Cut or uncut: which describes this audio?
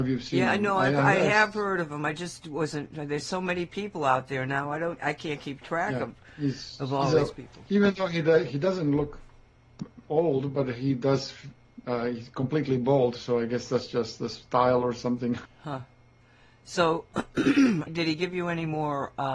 cut